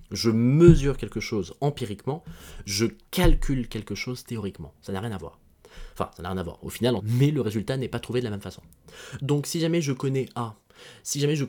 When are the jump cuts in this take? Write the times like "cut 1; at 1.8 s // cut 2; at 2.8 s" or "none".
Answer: cut 1; at 7.0 s // cut 2; at 9.2 s